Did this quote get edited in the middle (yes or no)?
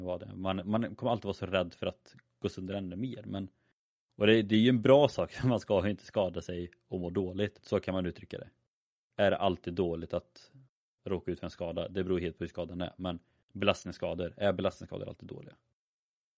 yes